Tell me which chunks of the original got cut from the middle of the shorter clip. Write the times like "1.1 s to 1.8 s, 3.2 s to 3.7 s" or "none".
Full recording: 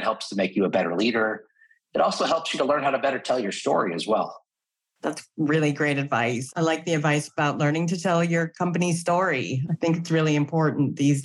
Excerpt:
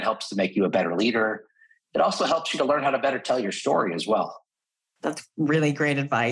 none